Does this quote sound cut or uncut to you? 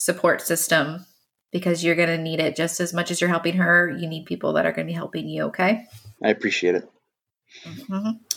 cut